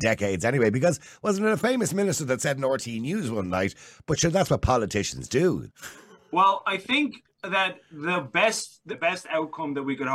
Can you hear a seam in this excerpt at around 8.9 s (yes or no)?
yes